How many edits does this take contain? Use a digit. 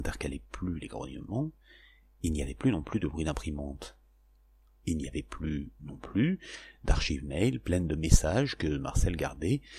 0